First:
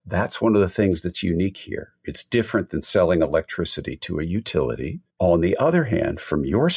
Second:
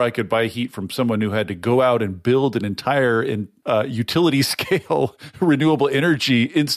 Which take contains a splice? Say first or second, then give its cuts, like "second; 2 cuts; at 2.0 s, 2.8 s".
first; 1 cut; at 5.1 s